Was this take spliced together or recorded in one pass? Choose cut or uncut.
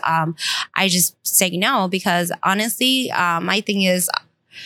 uncut